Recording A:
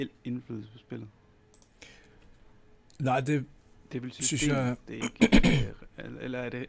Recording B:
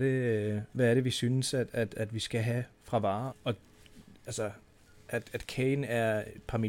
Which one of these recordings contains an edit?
B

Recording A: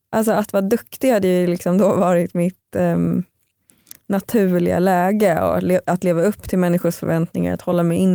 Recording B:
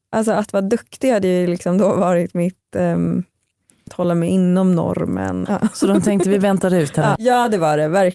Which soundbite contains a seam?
B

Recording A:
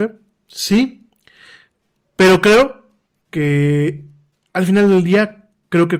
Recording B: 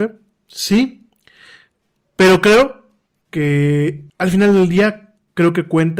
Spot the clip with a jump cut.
B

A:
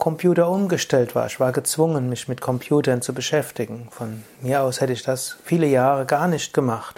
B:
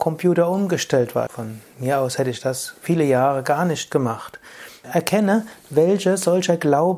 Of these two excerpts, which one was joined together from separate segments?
B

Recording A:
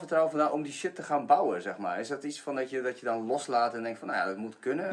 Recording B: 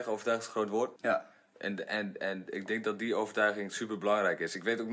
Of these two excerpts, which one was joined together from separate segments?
B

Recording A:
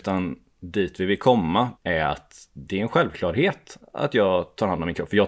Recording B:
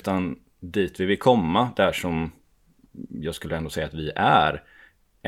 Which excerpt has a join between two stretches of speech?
A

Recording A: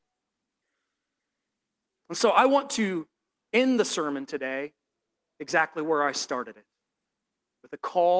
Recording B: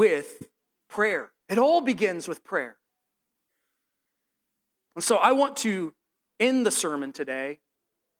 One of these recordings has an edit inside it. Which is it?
B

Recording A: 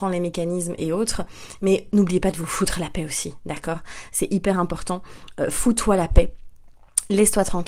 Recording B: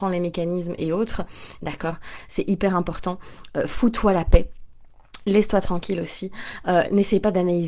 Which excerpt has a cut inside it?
B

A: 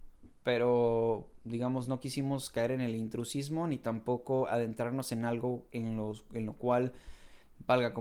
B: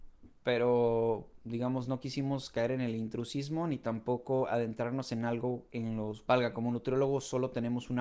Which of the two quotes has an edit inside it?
B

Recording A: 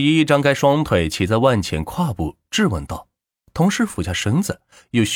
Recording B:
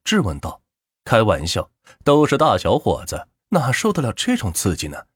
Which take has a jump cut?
B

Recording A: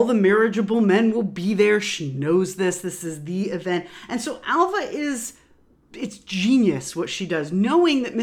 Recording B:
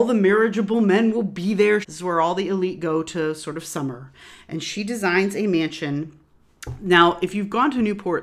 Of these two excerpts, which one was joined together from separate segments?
B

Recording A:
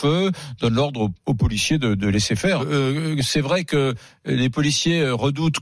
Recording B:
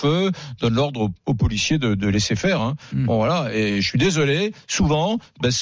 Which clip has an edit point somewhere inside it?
A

